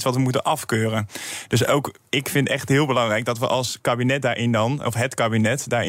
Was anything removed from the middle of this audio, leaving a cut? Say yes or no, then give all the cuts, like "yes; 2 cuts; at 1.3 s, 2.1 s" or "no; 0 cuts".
no; 0 cuts